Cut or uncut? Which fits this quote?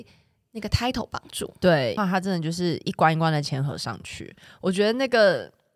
cut